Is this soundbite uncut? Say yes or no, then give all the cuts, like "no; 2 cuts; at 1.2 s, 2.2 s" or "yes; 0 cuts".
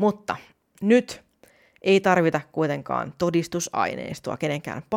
yes; 0 cuts